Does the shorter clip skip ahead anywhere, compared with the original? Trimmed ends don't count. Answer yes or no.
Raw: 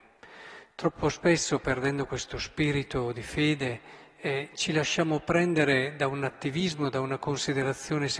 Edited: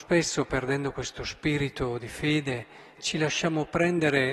yes